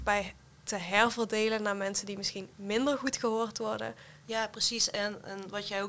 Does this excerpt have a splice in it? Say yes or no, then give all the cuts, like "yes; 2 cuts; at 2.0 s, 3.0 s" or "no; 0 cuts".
yes; 1 cut; at 4.2 s